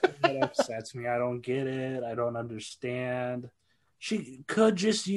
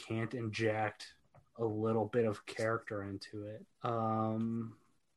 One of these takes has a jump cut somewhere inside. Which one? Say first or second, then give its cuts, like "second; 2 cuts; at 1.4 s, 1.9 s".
second; 1 cut; at 3.7 s